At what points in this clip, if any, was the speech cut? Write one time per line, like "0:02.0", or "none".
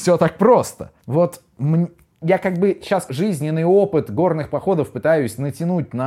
0:01.0
0:03.1